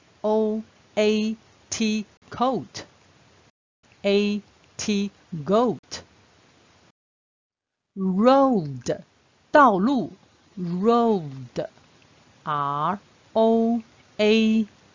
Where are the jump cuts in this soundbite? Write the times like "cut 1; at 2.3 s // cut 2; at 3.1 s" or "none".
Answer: cut 1; at 3.8 s